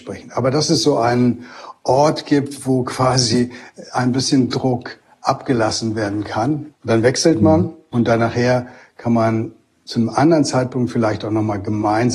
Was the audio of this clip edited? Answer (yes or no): yes